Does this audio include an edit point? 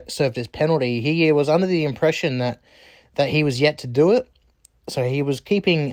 no; 0 cuts

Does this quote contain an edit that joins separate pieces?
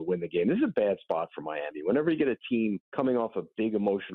yes; 1 cut; at 2.9 s

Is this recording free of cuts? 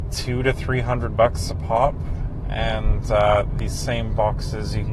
yes; 0 cuts

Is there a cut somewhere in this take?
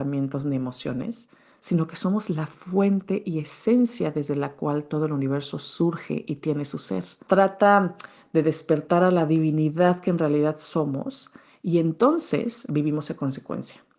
yes; 1 cut; at 7.3 s

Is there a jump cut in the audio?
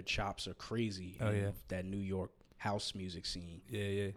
yes; 1 cut; at 1.5 s

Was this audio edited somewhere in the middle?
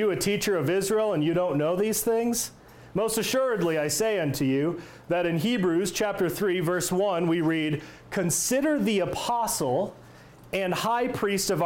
no; 0 cuts

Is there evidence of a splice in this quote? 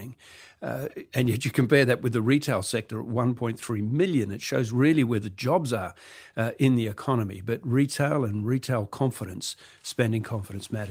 no; 0 cuts

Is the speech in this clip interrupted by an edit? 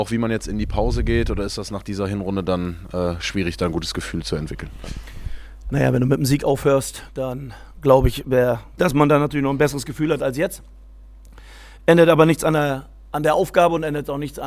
yes; 1 cut; at 8.8 s

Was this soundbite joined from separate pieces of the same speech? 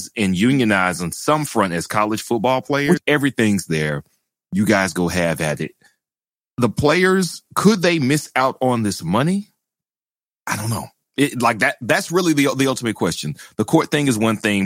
yes; 1 cut; at 3.0 s

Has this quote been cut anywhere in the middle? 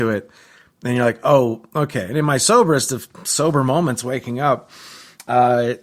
no; 0 cuts

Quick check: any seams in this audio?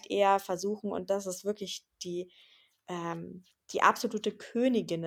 no; 0 cuts

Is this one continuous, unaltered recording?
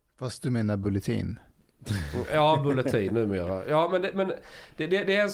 yes; 0 cuts

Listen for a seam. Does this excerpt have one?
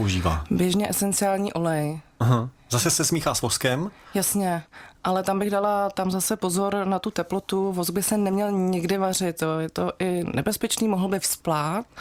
no; 0 cuts

